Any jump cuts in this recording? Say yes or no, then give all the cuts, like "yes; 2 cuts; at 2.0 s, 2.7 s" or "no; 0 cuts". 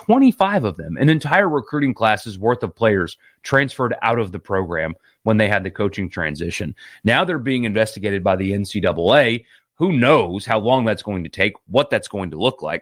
no; 0 cuts